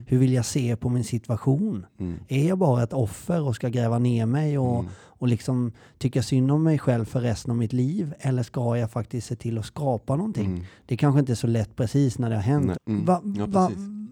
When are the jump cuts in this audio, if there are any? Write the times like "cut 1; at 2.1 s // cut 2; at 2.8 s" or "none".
cut 1; at 12.7 s